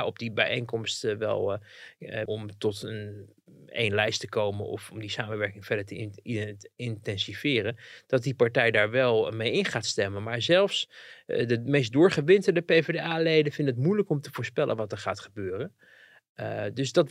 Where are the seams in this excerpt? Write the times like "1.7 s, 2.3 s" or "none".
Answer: 2.3 s